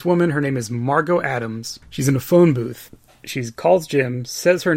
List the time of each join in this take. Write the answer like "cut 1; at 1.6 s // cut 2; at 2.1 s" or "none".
cut 1; at 1.8 s